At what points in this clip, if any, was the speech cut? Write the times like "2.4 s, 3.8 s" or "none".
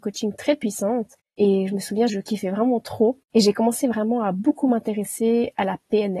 2.1 s, 3.2 s